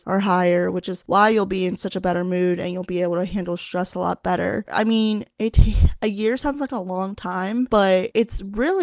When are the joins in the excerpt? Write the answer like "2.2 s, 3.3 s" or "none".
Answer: 4.7 s